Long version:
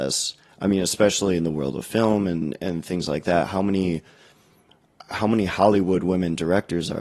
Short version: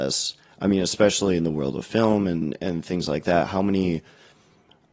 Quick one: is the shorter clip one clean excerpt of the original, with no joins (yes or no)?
yes